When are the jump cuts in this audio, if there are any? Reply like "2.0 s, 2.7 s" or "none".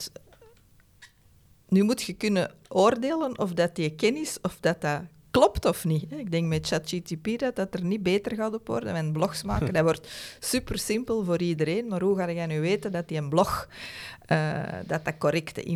2.6 s